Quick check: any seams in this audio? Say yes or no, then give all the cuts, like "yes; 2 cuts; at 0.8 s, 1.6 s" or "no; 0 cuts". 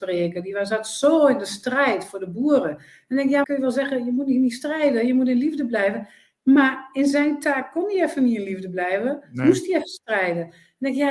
yes; 1 cut; at 3.4 s